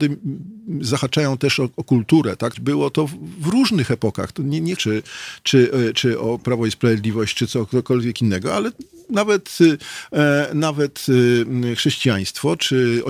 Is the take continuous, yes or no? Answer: no